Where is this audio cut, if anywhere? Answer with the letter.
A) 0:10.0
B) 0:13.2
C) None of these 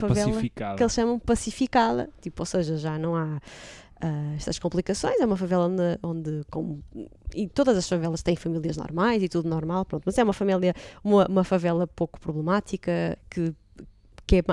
B